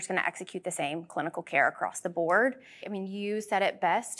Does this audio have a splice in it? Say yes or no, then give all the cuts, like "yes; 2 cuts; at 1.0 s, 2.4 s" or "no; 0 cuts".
yes; 1 cut; at 2.8 s